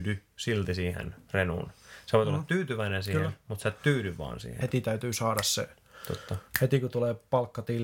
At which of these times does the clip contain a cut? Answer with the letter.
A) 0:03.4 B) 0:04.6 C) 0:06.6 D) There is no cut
B